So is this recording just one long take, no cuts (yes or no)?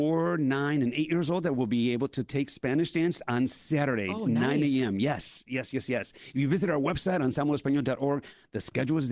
yes